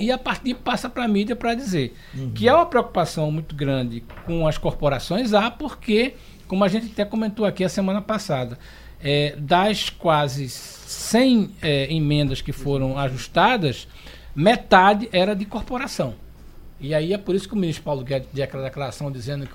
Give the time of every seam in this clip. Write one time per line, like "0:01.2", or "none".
none